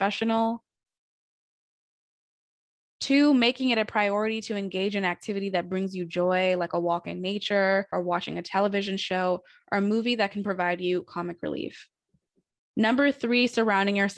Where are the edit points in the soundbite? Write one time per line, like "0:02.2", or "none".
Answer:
none